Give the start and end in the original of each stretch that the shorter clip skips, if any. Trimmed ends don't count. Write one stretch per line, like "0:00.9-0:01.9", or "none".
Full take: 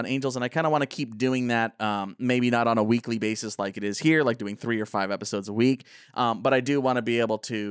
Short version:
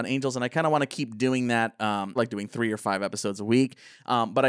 0:02.2-0:04.2